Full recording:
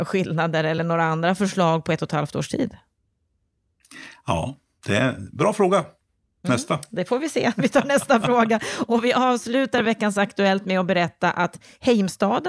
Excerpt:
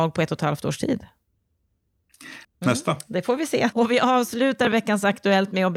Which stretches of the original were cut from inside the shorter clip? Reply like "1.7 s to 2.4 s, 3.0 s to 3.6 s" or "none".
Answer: 4.1 s to 6.3 s, 7.6 s to 8.9 s

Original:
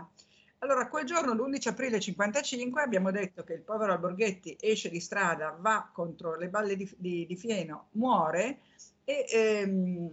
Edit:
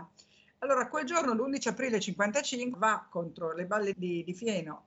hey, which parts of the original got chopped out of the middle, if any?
2.7 s to 5.6 s, 6.8 s to 7.0 s

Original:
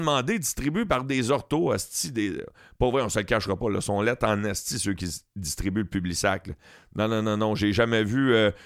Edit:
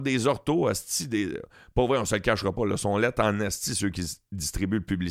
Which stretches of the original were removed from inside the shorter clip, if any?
none

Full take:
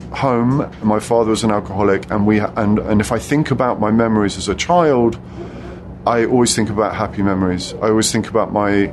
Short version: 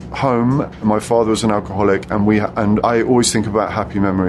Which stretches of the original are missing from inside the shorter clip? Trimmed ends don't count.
2.8 s to 6.0 s

